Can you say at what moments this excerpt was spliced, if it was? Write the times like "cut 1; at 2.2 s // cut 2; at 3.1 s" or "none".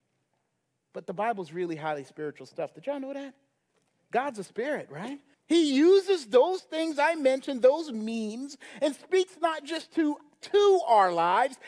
cut 1; at 5.3 s